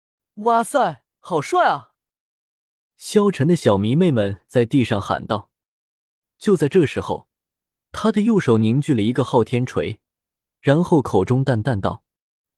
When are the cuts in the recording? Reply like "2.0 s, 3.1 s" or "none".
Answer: 2.9 s, 6.2 s